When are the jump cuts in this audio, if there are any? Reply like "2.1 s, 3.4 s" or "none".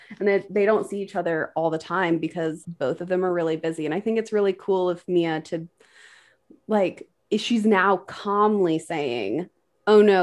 2.6 s